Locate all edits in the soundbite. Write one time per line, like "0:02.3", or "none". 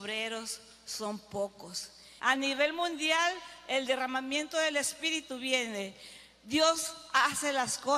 0:02.2